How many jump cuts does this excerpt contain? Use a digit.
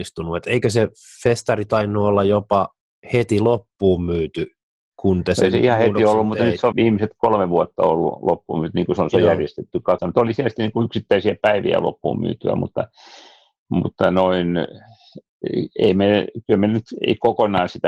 2